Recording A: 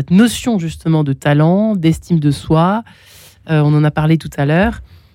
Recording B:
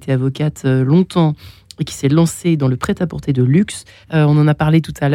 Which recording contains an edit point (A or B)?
B